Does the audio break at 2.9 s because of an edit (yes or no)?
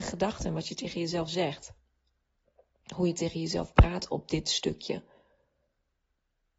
no